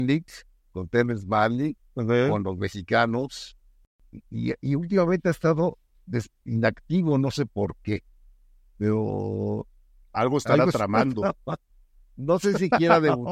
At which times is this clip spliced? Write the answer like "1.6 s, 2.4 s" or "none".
none